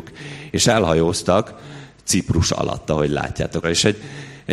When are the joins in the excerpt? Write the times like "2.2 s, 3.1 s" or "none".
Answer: 3.6 s

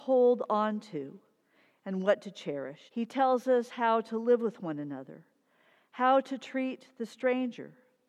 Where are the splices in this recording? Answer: 2.9 s

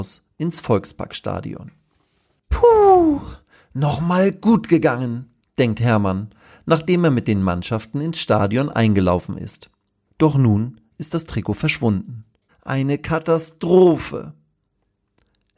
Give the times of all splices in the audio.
10.1 s, 12.5 s

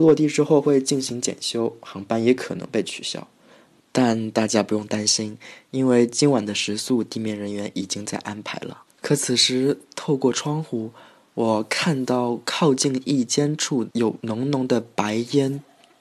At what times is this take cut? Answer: 8.9 s

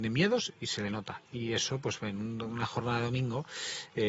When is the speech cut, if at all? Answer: none

